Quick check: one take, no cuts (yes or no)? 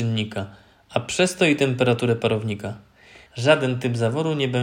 no